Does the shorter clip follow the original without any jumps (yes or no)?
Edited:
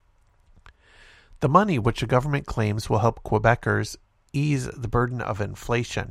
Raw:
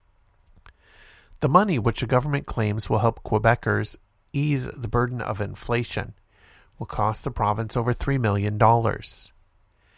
yes